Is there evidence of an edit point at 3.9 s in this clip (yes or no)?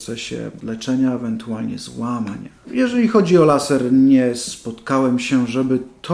no